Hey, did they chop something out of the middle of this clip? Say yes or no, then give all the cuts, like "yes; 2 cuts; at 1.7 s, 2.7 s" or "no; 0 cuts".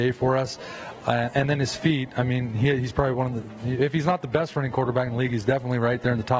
no; 0 cuts